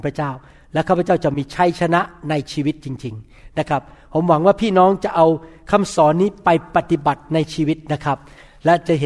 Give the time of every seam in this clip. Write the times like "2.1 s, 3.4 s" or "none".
none

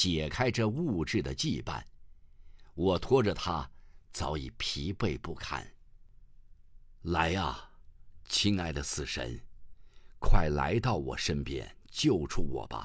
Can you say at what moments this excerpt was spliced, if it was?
none

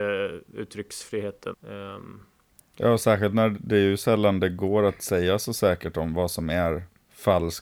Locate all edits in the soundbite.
1.5 s

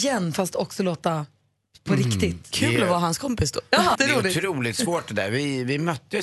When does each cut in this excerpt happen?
3.9 s

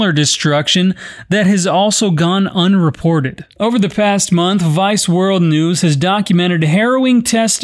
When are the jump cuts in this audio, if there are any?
none

